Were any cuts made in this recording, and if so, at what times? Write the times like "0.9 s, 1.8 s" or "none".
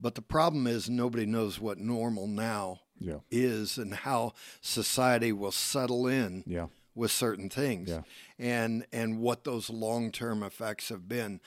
none